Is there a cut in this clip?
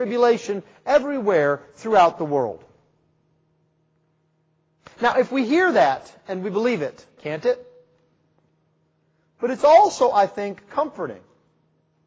yes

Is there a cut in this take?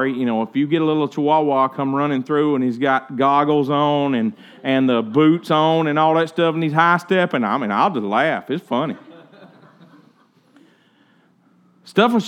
no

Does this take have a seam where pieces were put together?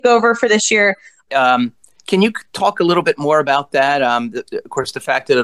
yes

